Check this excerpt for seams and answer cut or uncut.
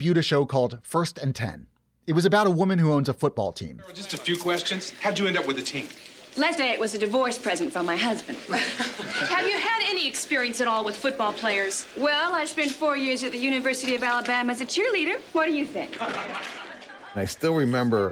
cut